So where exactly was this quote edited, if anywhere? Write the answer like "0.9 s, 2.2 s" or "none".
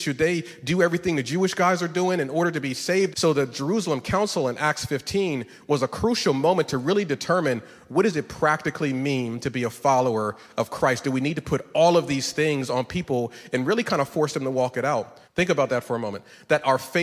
3.1 s, 15.2 s